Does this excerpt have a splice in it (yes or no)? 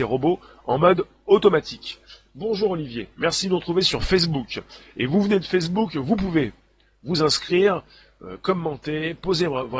no